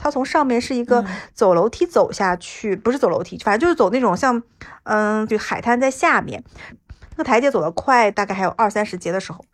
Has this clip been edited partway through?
yes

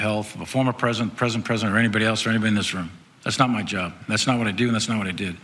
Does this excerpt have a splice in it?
no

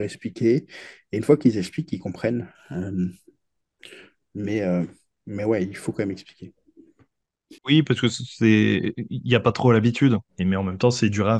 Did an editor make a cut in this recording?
yes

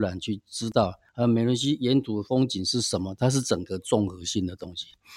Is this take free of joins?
yes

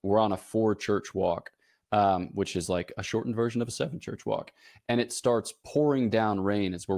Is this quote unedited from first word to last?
yes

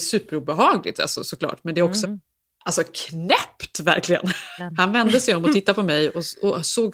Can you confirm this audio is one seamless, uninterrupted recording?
no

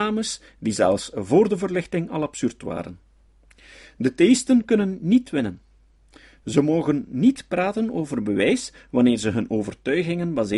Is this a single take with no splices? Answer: yes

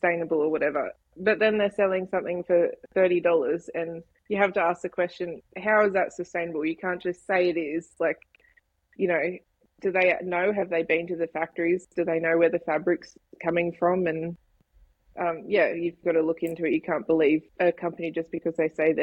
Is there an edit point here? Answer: yes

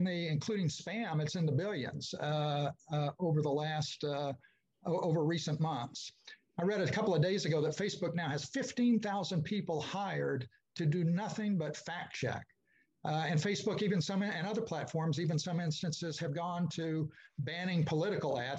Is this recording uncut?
yes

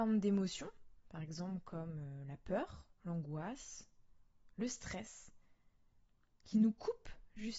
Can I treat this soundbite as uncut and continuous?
no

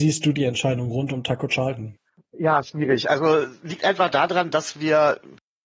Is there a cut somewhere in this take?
no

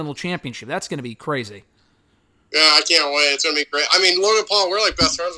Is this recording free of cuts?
yes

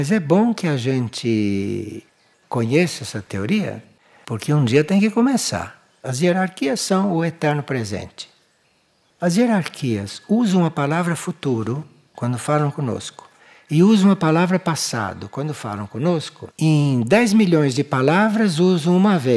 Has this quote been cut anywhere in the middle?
yes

